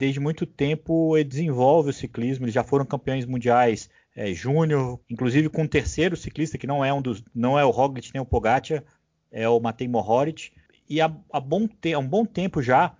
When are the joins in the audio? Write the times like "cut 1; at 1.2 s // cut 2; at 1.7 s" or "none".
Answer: cut 1; at 5.0 s